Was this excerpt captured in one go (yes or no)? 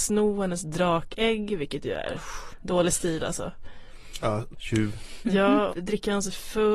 no